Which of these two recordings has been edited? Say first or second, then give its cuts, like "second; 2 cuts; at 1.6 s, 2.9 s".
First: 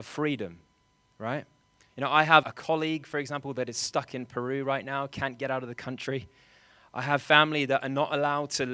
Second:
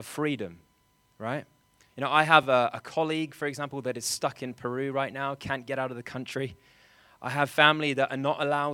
first; 1 cut; at 2.4 s